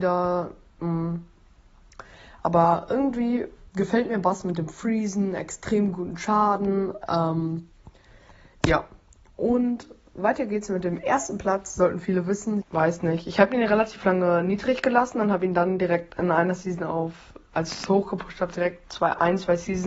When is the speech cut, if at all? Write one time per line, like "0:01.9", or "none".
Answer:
0:12.6
0:17.5